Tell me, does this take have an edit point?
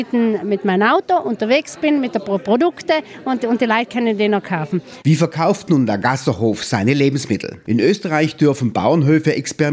yes; 2 cuts; at 5.0 s, 7.6 s

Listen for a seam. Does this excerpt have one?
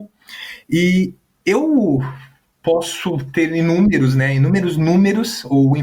no; 0 cuts

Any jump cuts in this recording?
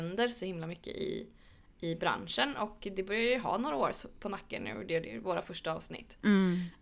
no; 0 cuts

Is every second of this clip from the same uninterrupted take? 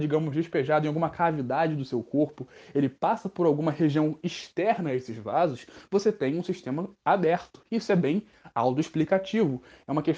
yes; 0 cuts

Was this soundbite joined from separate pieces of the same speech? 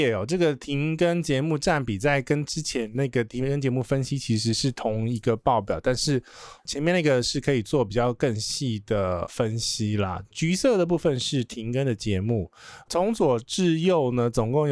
yes; 1 cut; at 10.3 s

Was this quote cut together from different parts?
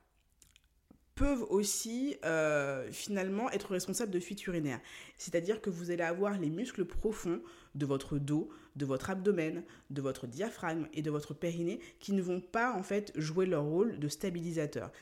yes; 1 cut; at 5.1 s

